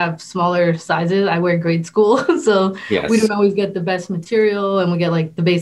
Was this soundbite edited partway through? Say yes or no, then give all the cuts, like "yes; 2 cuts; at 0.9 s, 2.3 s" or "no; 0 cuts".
no; 0 cuts